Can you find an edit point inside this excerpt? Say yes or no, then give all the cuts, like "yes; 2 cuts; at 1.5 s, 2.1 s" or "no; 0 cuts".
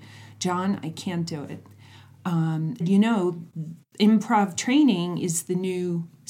yes; 1 cut; at 2.8 s